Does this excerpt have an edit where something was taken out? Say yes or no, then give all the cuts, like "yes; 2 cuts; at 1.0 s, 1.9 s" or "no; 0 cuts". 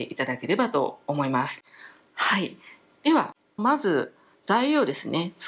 yes; 1 cut; at 3.6 s